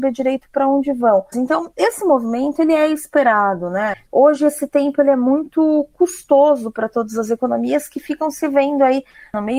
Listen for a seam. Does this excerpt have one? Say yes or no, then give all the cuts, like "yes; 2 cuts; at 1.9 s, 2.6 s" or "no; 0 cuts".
yes; 2 cuts; at 1.3 s, 3.9 s